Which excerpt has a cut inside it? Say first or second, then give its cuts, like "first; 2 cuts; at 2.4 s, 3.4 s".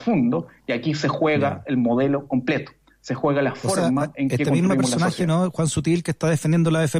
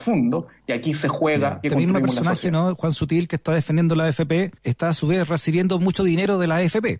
second; 2 cuts; at 1.6 s, 4.6 s